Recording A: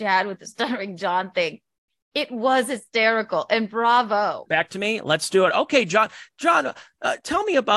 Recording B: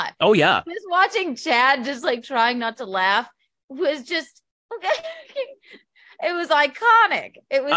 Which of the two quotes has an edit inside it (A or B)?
A